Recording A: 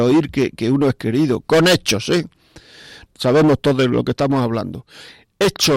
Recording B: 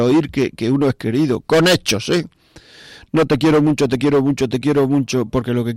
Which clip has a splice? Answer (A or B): A